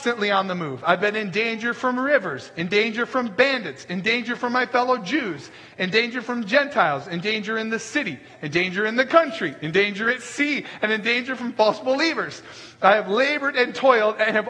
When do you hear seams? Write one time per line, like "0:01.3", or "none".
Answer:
none